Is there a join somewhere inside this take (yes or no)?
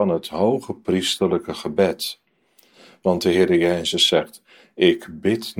no